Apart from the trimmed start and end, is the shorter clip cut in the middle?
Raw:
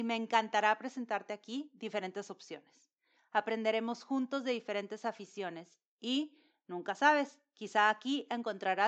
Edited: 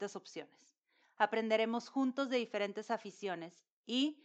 no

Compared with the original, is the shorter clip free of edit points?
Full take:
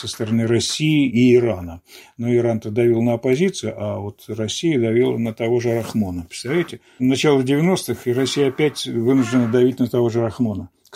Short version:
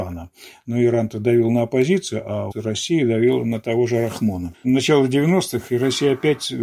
no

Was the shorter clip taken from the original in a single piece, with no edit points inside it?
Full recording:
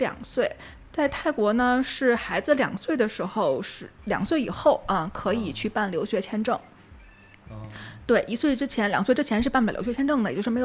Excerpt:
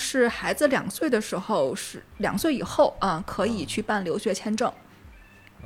yes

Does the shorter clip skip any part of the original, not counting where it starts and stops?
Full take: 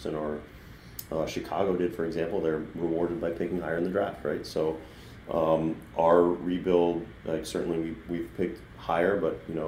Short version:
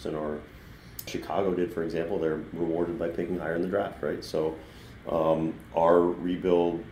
yes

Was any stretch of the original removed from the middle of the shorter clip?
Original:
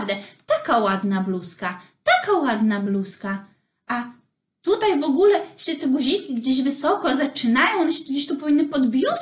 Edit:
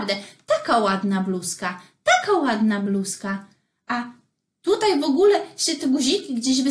no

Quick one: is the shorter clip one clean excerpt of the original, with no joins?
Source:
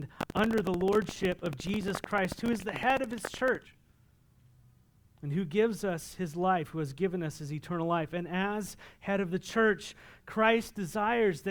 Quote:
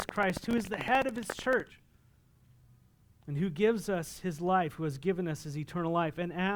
yes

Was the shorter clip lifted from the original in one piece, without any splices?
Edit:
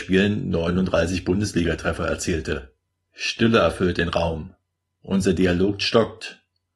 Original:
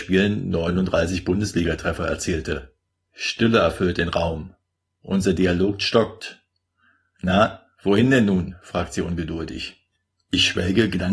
yes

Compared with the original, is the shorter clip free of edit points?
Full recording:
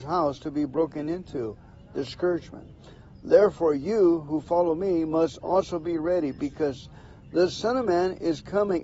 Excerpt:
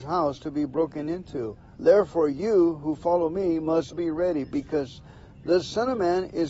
no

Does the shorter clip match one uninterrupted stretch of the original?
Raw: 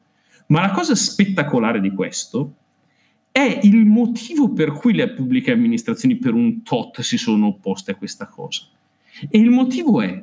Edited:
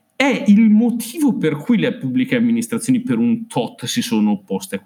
yes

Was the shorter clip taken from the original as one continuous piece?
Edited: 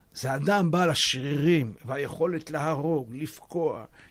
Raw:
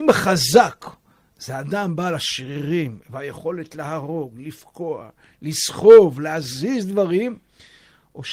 yes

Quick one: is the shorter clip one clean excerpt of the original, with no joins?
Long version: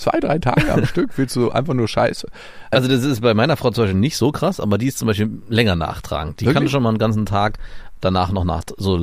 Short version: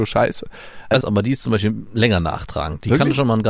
no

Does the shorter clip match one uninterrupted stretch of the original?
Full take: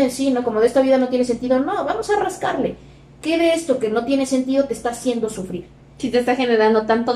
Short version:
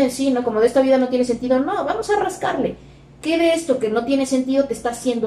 yes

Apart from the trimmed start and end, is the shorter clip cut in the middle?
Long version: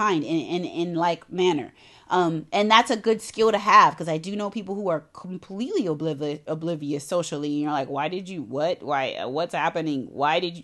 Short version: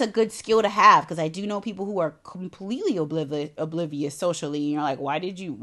no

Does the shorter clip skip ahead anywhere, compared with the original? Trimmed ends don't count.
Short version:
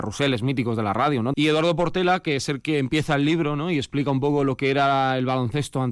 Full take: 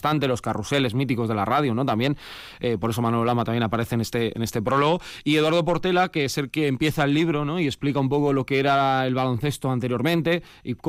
yes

